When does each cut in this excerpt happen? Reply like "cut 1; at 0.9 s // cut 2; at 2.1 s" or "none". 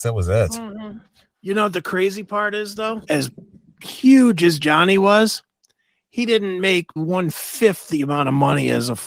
cut 1; at 3.0 s // cut 2; at 7.0 s